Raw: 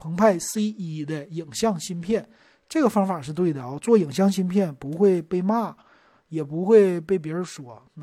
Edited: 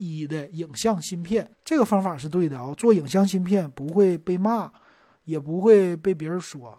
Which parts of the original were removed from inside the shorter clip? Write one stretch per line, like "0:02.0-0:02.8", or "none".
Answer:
0:02.3-0:02.6